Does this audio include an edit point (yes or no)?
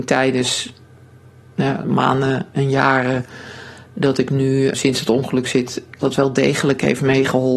yes